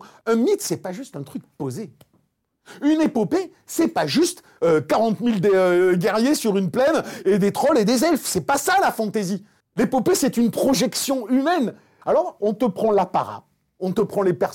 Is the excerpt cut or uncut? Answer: cut